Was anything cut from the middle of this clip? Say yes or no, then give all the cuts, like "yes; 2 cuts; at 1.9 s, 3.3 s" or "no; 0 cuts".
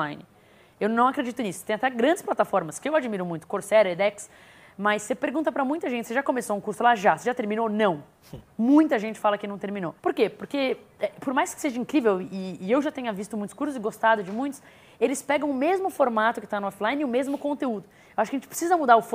yes; 1 cut; at 10.0 s